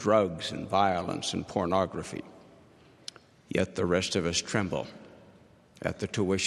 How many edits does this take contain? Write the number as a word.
one